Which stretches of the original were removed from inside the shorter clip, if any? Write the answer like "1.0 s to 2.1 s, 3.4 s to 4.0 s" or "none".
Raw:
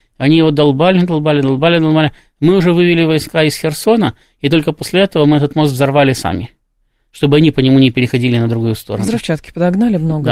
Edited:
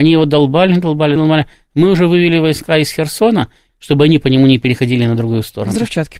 1.4 s to 1.8 s, 4.3 s to 7.0 s